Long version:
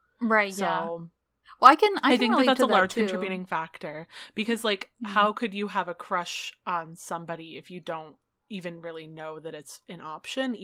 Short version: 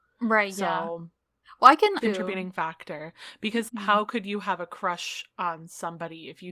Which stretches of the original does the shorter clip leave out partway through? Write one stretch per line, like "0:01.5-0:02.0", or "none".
0:02.0-0:02.9
0:04.6-0:05.0